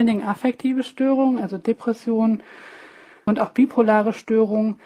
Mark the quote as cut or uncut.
uncut